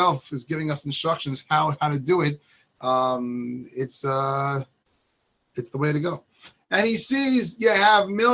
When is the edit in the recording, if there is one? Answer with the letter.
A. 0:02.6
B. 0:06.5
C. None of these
B